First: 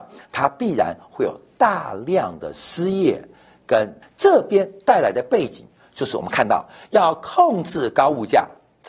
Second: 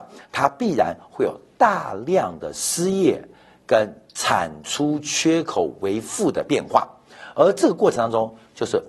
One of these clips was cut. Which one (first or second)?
first